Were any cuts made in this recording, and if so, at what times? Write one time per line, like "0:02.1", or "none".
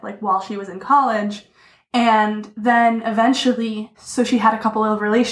0:03.9